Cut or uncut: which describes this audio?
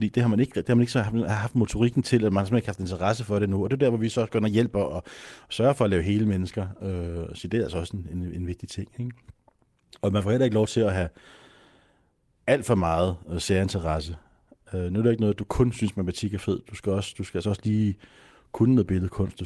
uncut